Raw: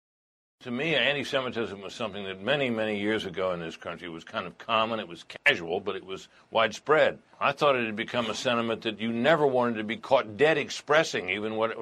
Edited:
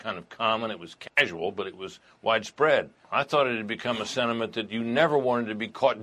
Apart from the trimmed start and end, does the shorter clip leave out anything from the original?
no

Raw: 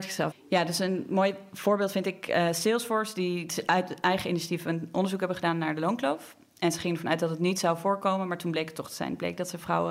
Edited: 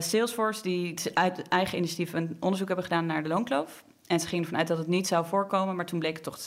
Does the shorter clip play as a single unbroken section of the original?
yes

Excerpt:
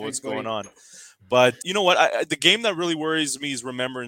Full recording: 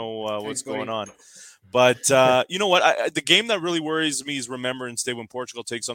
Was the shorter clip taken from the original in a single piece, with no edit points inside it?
no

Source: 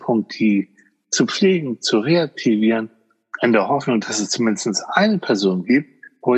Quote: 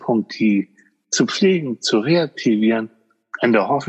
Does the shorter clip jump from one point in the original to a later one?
no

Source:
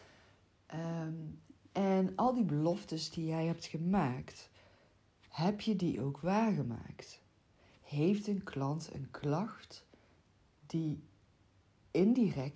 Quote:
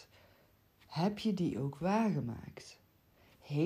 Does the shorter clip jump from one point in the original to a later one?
no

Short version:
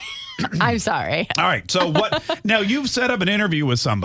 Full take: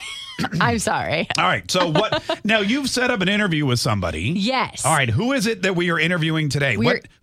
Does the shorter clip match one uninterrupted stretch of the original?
yes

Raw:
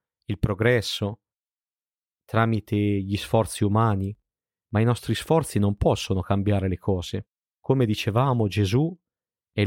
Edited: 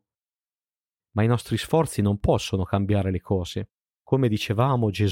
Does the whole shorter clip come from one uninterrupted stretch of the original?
no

